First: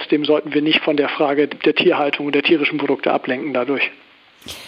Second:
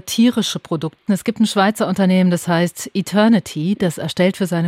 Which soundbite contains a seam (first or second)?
second